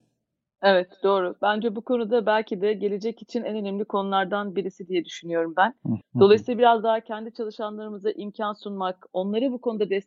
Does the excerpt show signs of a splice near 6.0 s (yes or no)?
yes